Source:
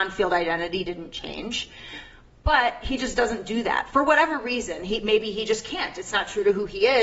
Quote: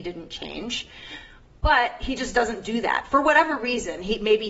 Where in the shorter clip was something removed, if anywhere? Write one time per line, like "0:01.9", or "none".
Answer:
none